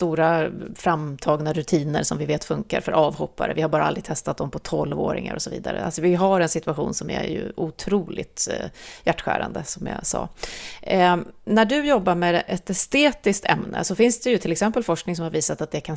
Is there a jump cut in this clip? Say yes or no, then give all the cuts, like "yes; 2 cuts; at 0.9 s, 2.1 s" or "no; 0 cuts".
no; 0 cuts